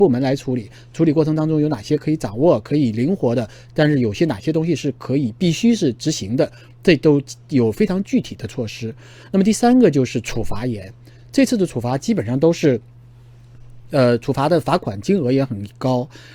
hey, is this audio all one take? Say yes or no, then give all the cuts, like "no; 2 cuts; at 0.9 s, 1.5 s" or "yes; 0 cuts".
yes; 0 cuts